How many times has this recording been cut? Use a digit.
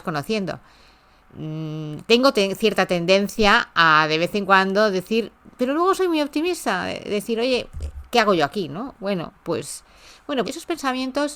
2